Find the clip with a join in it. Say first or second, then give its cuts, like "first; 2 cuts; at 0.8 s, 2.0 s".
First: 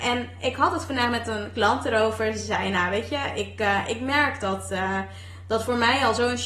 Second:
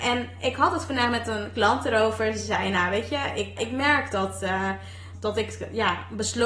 second; 2 cuts; at 3.6 s, 5.1 s